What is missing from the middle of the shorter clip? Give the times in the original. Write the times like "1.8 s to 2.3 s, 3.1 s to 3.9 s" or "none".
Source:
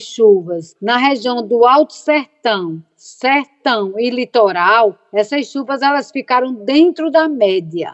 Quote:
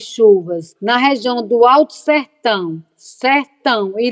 none